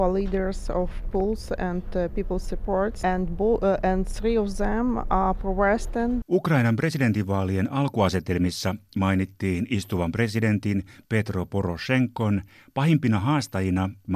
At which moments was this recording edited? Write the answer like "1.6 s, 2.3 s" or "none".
3.0 s, 6.2 s